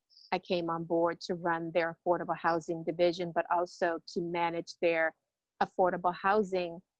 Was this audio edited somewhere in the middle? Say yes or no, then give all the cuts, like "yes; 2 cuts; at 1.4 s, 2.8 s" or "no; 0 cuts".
no; 0 cuts